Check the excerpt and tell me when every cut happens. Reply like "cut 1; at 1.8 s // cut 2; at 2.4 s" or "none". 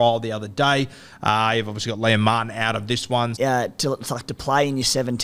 cut 1; at 3.4 s